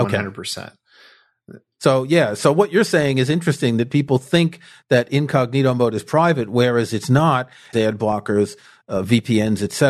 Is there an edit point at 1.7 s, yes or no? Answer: no